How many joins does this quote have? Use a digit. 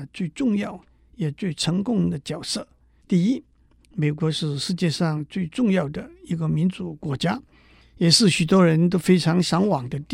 1